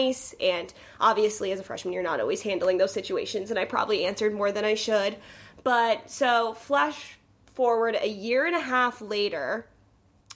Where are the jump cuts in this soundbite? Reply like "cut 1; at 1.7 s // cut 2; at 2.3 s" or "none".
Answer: none

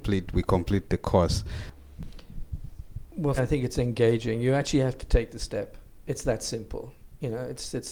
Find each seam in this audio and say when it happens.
cut 1; at 3.4 s

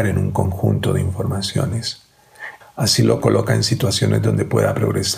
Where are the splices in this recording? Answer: cut 1; at 2.6 s

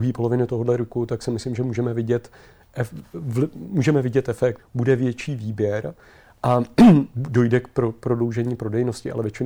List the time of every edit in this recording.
cut 1; at 4.6 s

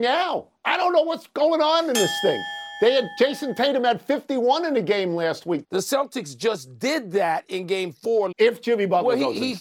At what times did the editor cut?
cut 1; at 5.6 s // cut 2; at 8.3 s

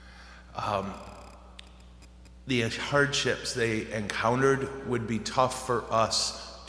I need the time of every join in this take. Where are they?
none

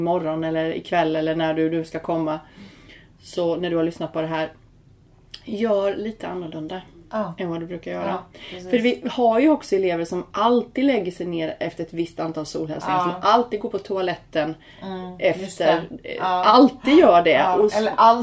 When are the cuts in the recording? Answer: none

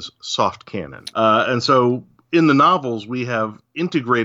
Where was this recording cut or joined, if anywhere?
cut 1; at 1.1 s

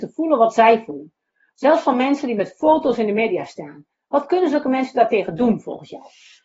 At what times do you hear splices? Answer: none

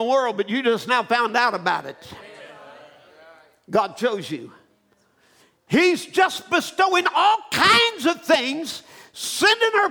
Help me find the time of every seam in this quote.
none

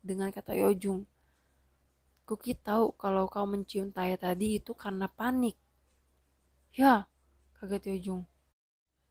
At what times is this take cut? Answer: none

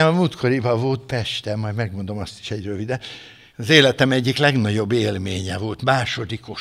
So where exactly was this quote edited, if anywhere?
cut 1; at 3.5 s

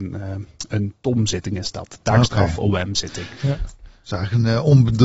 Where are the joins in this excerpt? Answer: none

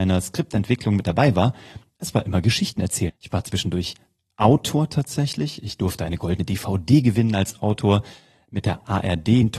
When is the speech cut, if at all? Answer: cut 1; at 3.1 s

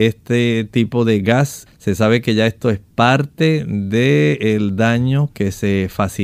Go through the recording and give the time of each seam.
cut 1; at 1.7 s

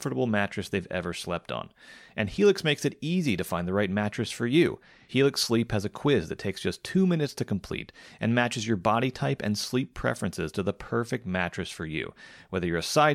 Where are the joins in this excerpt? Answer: none

